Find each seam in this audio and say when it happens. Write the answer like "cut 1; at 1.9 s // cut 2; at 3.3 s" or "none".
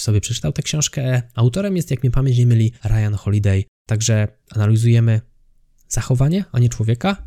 cut 1; at 3.7 s